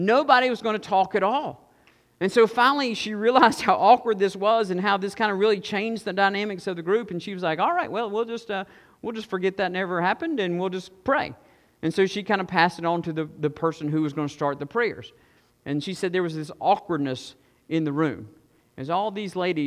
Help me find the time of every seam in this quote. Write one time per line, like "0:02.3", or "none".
0:15.5
0:18.6